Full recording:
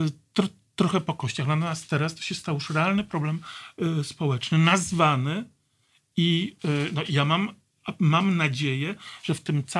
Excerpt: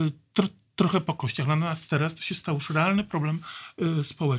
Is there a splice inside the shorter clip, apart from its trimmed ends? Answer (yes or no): no